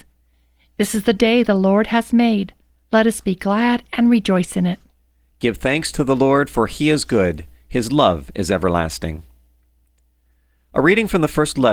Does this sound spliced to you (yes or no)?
no